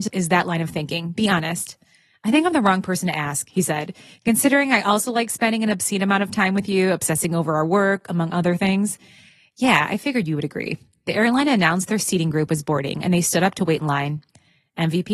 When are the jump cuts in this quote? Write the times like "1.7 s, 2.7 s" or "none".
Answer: none